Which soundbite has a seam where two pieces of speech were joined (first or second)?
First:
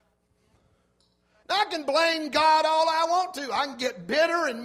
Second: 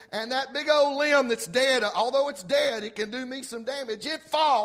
first